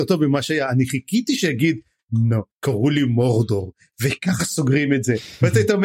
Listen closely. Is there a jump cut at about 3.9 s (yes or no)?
no